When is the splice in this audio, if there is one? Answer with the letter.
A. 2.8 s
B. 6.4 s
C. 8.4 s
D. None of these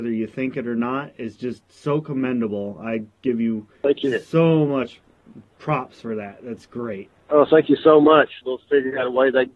C